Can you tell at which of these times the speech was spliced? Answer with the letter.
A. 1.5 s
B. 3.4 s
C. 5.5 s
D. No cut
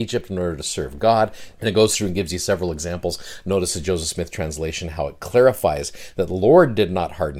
A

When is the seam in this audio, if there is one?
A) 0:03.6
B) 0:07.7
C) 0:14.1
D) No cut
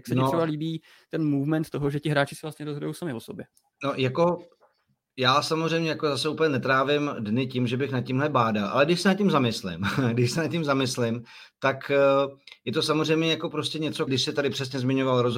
C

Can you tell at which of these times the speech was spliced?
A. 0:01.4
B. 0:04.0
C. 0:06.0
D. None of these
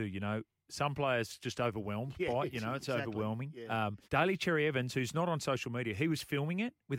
B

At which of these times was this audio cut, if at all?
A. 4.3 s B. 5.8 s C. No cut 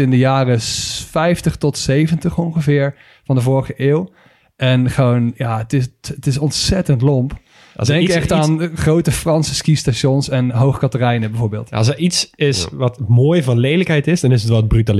C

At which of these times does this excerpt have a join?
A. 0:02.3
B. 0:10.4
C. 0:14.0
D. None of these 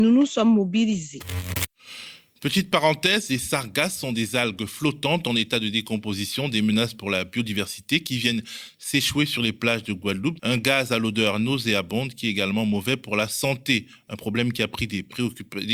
B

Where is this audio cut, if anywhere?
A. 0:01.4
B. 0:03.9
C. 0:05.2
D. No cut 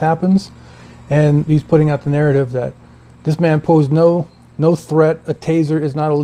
A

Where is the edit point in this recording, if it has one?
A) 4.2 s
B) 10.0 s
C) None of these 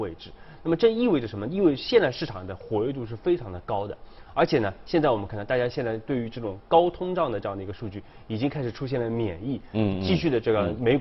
C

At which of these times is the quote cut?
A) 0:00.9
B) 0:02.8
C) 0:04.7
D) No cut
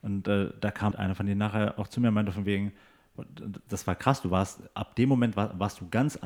A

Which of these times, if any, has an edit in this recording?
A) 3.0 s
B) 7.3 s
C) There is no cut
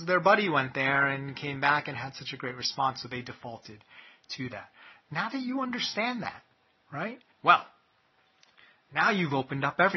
B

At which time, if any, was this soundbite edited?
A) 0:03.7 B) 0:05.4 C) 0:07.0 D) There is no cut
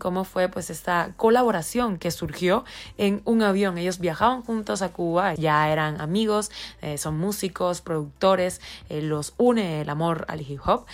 B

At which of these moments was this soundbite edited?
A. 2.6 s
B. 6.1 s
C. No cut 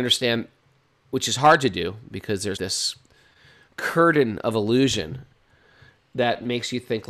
A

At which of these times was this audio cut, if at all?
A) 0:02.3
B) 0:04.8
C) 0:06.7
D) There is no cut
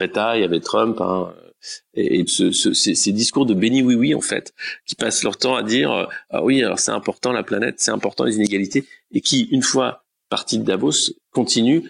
A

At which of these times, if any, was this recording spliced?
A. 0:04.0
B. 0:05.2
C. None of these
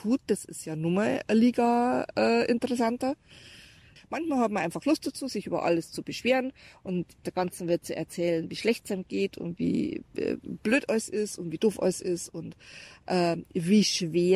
A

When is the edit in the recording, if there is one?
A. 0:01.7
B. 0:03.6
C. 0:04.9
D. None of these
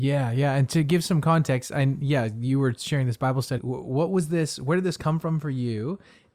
B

